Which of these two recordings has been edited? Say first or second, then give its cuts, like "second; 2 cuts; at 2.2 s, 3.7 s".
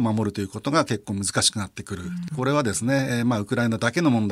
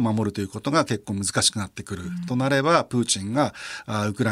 first; 1 cut; at 2.3 s